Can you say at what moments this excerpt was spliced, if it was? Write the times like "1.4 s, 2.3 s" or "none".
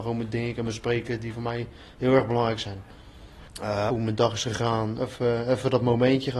3.9 s, 5.0 s